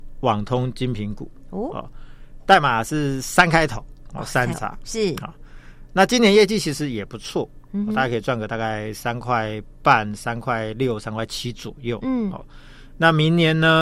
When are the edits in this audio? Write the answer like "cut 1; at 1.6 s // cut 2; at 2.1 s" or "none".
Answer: cut 1; at 4.5 s